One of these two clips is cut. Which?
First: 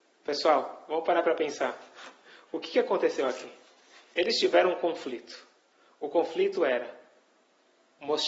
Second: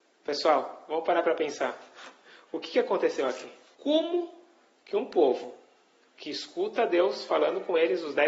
second; 1 cut; at 3.8 s

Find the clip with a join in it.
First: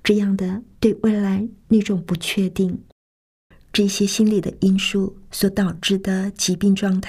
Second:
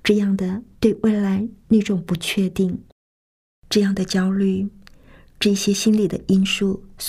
first; 1 cut; at 3.5 s

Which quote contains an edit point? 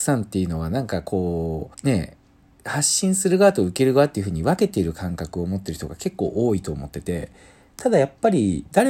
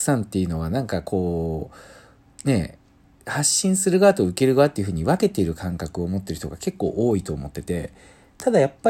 first; 1 cut; at 1.7 s

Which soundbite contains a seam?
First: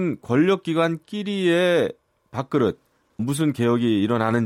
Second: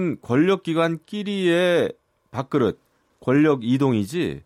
first; 1 cut; at 3.2 s

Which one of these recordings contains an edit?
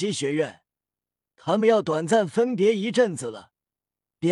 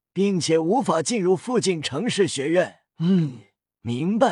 second; 1 cut; at 2.9 s

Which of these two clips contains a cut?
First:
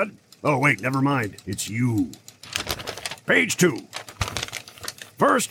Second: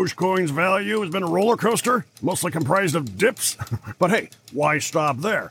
second; 1 cut; at 3.9 s

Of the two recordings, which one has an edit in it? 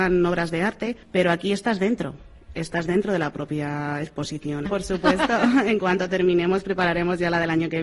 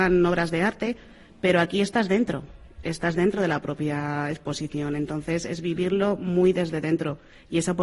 first; 2 cuts; at 1.0 s, 4.7 s

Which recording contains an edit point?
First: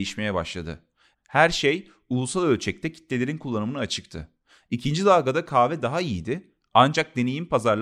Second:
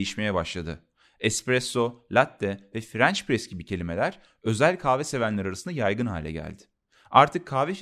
first; 1 cut; at 1.1 s

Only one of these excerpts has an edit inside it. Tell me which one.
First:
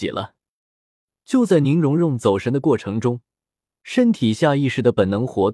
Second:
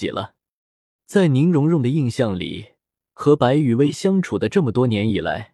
second; 1 cut; at 1.0 s

